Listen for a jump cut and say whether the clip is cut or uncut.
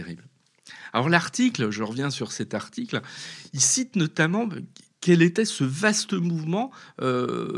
uncut